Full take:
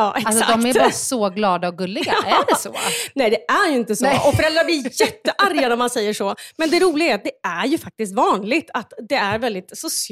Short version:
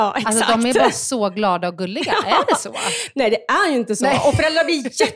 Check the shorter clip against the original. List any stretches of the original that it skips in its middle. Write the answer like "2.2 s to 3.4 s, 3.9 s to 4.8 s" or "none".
none